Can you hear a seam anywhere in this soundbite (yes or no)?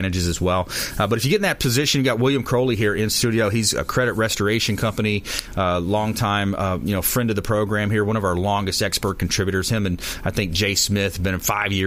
no